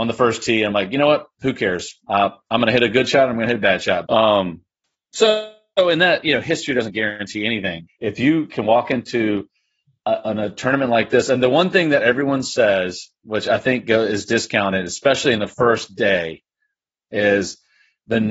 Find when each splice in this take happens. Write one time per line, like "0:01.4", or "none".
0:04.1
0:07.9